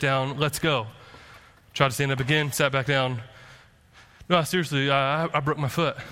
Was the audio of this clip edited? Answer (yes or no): no